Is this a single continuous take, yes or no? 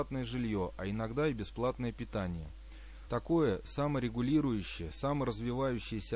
no